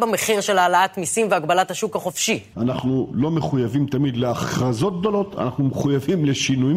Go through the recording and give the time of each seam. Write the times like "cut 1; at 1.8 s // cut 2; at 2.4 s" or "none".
cut 1; at 2.5 s